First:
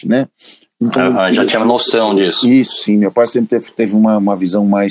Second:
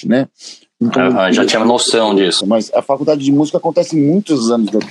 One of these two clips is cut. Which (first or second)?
second